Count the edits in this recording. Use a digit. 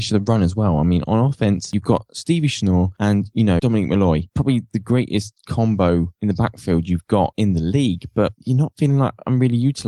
1